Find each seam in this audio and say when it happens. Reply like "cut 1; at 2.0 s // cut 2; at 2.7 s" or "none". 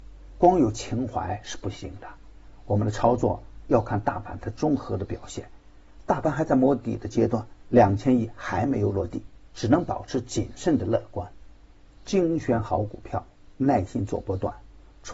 cut 1; at 7.6 s // cut 2; at 9.5 s